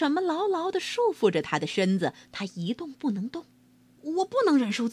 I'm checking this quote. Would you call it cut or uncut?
cut